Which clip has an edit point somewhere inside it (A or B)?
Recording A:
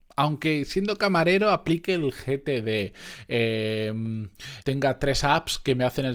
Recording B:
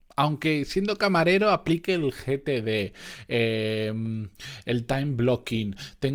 A